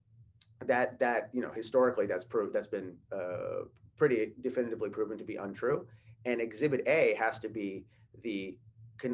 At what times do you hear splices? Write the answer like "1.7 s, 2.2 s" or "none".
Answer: none